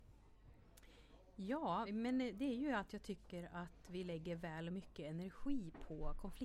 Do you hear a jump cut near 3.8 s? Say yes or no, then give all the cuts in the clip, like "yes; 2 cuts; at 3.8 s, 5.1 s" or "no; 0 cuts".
no; 1 cut; at 1.8 s